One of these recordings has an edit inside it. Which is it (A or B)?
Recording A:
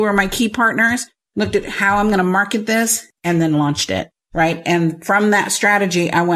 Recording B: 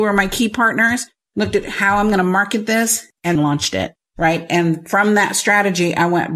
B